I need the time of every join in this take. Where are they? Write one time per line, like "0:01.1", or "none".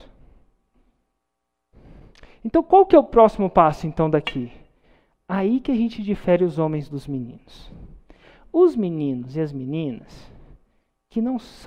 none